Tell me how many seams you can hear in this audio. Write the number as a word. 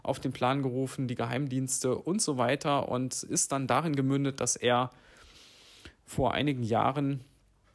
zero